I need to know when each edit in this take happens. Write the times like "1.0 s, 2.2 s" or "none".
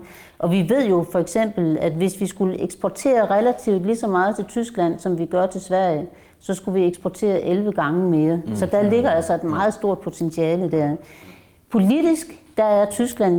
none